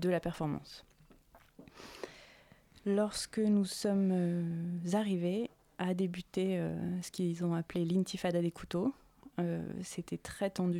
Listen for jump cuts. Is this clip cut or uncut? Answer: uncut